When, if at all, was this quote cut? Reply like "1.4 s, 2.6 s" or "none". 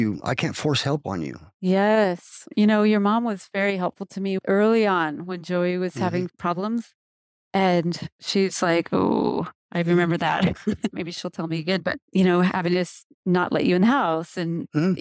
10.9 s, 13.1 s